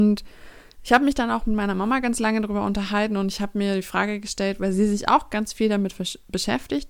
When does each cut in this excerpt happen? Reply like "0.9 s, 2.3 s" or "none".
none